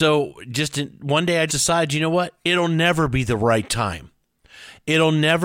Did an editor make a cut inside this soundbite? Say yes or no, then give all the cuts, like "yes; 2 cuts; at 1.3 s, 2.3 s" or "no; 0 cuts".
yes; 1 cut; at 1.5 s